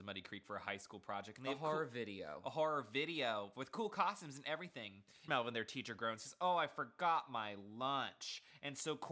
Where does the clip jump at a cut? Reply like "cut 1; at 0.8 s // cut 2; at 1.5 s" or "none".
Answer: cut 1; at 5.3 s